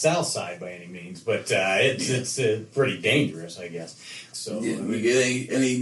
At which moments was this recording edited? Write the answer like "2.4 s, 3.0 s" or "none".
4.3 s